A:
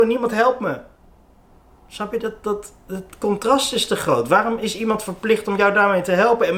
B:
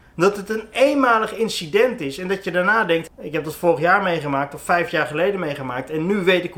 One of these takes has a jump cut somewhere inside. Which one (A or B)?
B